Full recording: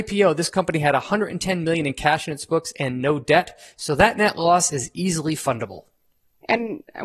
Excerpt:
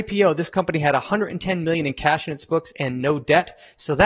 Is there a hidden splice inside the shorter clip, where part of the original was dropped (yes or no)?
no